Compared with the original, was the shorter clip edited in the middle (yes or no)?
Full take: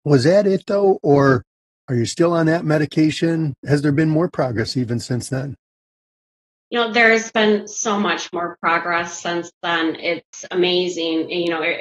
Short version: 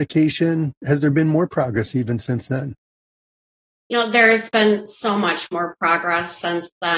no